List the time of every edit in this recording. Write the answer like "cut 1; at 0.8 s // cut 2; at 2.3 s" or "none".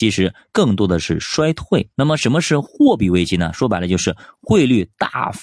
cut 1; at 1.9 s